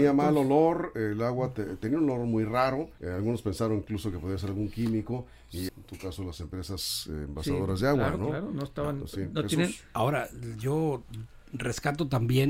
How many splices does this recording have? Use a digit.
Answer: 2